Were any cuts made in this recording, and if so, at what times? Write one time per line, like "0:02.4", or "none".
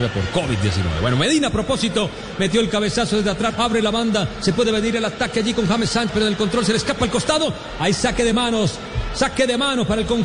0:03.5
0:06.1